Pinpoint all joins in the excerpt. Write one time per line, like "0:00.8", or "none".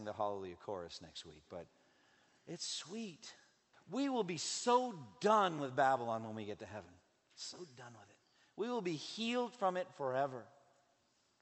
0:03.7